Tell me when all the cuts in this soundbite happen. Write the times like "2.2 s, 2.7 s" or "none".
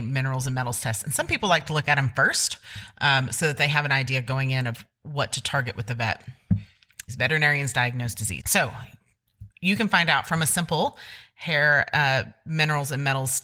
7.1 s, 8.4 s